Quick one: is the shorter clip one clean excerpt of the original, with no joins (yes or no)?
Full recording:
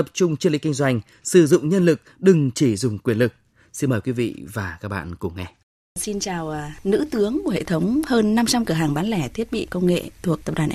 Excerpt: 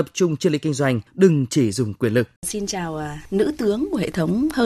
no